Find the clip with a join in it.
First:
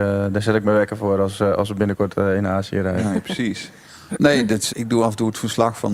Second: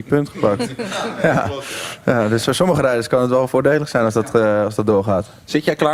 first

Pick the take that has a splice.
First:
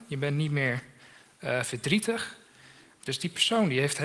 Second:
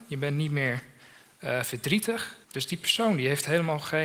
second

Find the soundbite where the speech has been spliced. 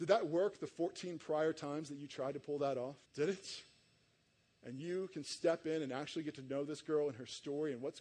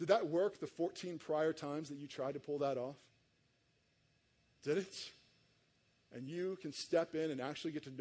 first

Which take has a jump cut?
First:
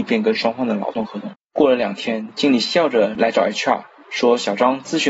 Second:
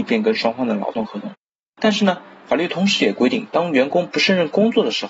first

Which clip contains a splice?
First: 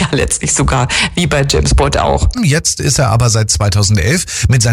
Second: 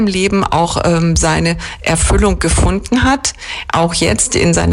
first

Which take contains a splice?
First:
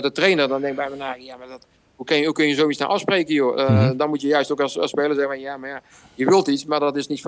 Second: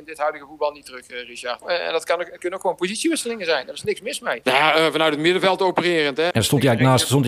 second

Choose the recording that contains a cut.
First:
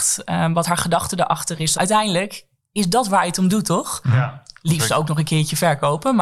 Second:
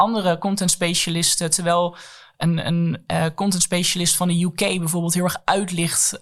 first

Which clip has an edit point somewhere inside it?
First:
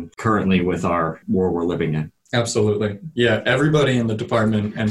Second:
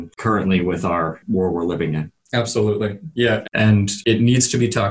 second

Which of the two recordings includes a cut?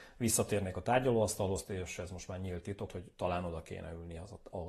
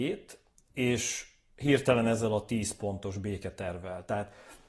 first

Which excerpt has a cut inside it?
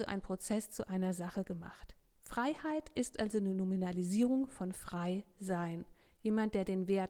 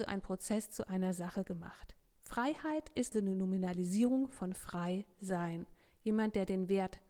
second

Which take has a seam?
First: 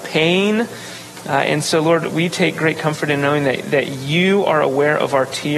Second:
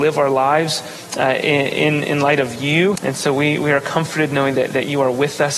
second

